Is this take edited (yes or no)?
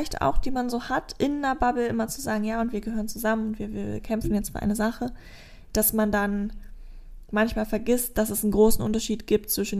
no